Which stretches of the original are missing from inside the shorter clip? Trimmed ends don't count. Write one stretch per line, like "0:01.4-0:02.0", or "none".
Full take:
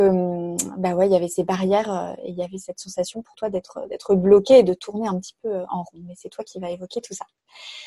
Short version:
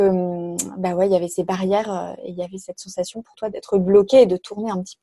0:03.5-0:03.9